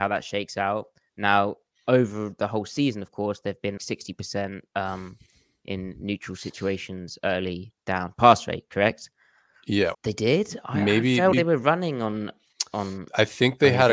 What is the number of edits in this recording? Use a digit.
3